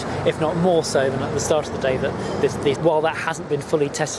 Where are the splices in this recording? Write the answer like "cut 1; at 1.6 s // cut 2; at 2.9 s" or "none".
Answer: cut 1; at 2.8 s